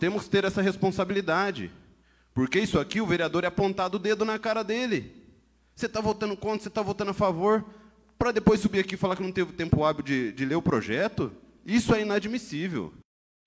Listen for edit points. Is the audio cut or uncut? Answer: uncut